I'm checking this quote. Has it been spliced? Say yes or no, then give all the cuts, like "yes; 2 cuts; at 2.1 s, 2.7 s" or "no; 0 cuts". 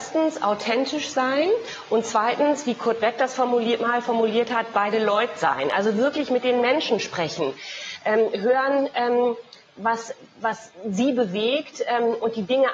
no; 0 cuts